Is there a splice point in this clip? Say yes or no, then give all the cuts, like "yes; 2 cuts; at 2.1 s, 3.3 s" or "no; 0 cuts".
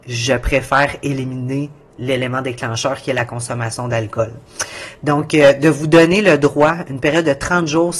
no; 0 cuts